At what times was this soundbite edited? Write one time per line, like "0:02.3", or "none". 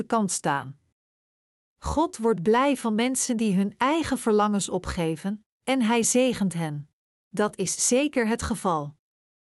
0:07.1